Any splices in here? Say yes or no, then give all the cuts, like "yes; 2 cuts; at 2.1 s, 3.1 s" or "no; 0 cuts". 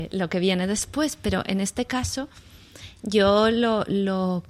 no; 0 cuts